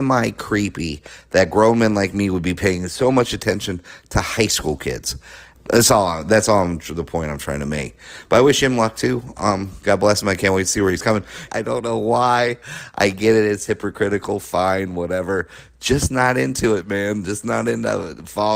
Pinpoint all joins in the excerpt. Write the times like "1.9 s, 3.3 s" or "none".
5.6 s, 11.5 s